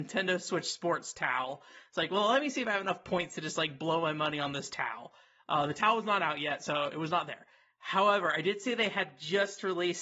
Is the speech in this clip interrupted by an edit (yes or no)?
no